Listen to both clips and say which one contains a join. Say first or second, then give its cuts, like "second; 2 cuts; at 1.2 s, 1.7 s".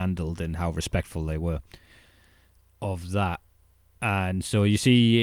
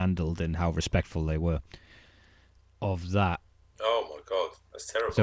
second; 1 cut; at 3.7 s